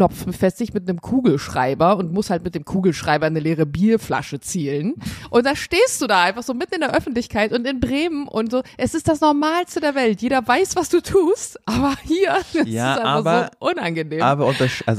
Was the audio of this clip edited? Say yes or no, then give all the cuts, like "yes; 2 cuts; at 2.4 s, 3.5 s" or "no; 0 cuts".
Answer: no; 0 cuts